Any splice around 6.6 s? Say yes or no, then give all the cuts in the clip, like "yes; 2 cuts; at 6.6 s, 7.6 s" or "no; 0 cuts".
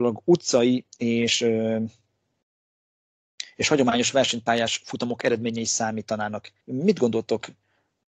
yes; 1 cut; at 6.6 s